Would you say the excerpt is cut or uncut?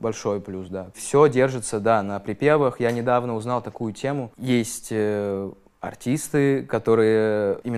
cut